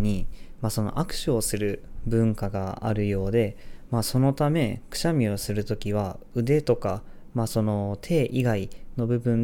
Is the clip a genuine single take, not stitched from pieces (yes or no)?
yes